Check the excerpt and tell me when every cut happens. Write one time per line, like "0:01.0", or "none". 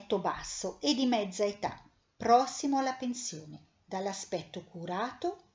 none